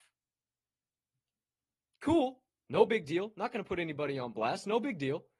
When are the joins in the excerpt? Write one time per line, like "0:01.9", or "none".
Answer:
none